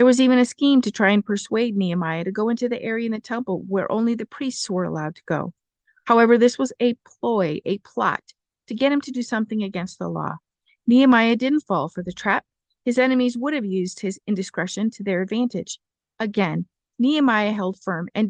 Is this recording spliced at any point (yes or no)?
no